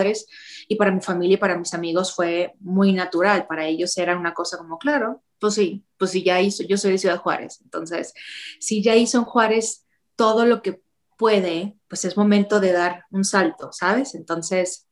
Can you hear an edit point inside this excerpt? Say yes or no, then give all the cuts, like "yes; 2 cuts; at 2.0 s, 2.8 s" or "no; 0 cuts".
no; 0 cuts